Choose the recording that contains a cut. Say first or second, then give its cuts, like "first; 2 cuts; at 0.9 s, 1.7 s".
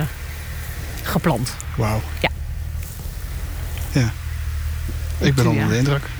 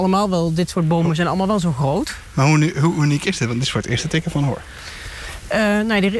first; 1 cut; at 3.9 s